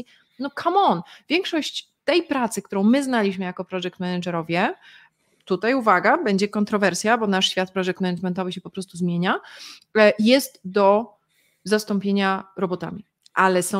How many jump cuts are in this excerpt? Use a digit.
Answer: 0